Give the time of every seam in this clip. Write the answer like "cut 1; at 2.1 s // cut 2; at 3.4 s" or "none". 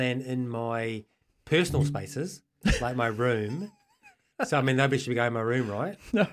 none

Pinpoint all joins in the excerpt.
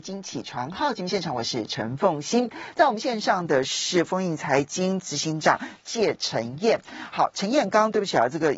none

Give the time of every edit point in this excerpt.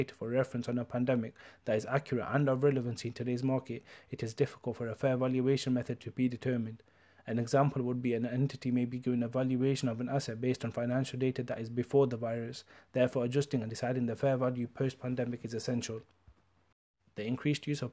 none

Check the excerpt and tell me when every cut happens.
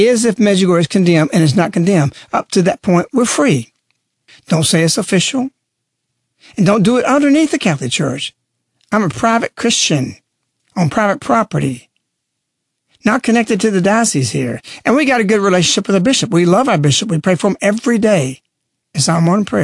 cut 1; at 4.3 s

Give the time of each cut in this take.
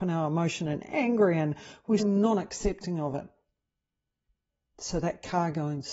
cut 1; at 2.0 s // cut 2; at 4.6 s

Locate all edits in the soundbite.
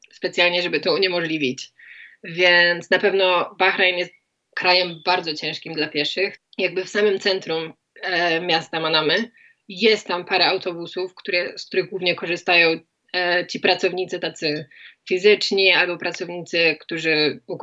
cut 1; at 6.4 s

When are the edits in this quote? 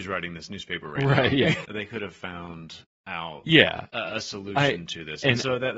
cut 1; at 1.6 s

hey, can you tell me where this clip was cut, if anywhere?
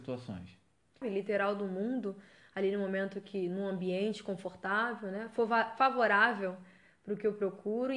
cut 1; at 1.0 s

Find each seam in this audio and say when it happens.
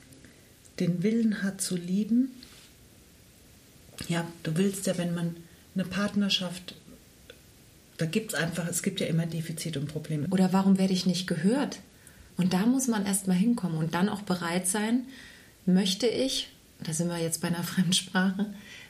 cut 1; at 10.3 s // cut 2; at 12.3 s

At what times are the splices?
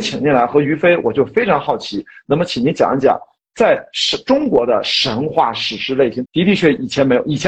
cut 1; at 6.2 s

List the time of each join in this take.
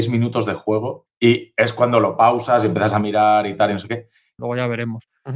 cut 1; at 1.1 s // cut 2; at 4.4 s

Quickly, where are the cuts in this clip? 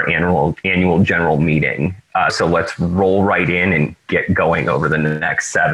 cut 1; at 2.3 s

